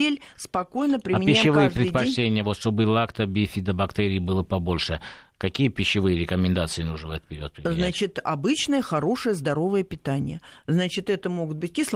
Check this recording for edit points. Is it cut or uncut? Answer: uncut